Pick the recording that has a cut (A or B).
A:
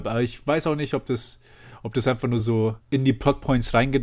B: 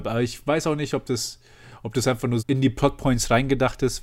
B